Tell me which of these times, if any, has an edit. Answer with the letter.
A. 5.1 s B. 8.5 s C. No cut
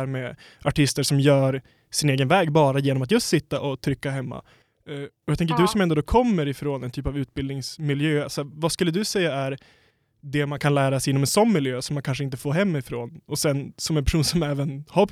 B